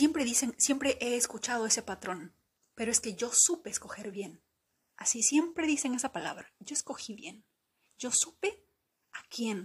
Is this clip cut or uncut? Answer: cut